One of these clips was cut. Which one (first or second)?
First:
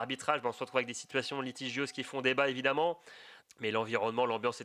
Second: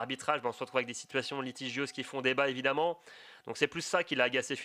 first